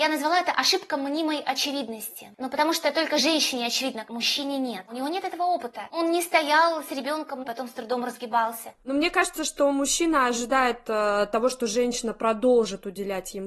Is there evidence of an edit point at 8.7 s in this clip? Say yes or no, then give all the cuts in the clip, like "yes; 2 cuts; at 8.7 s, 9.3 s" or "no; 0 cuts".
yes; 3 cuts; at 4.0 s, 7.4 s, 8.7 s